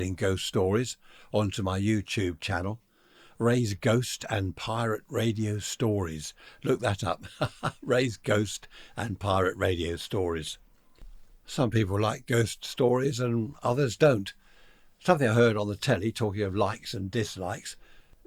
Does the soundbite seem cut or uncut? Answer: uncut